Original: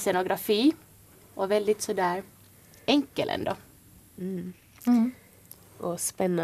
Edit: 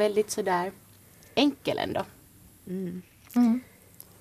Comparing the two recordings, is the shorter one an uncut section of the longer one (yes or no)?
yes